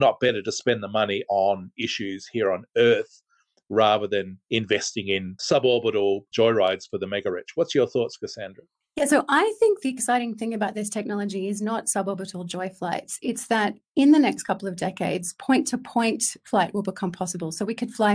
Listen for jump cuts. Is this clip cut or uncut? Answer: uncut